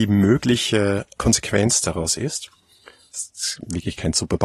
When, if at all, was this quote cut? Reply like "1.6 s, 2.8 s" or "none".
3.1 s